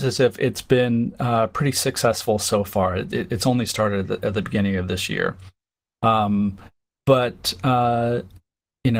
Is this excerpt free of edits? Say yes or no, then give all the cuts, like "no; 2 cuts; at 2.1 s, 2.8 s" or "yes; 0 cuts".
yes; 0 cuts